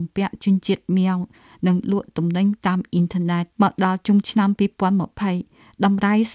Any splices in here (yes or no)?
yes